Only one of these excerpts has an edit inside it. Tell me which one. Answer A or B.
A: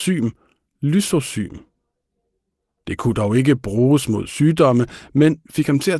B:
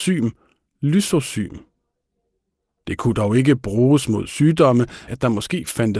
B